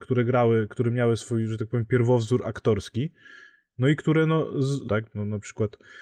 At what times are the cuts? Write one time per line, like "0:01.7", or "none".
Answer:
0:04.9